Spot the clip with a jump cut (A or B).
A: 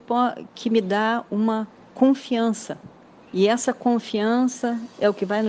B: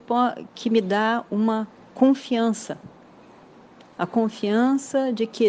A